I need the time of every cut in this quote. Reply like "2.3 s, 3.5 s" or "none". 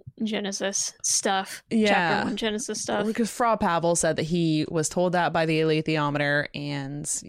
none